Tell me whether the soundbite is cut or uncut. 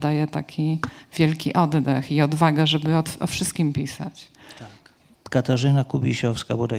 cut